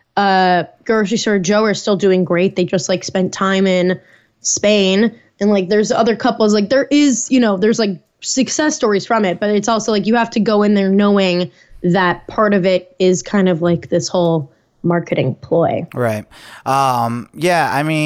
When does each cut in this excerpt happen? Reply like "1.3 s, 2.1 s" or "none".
none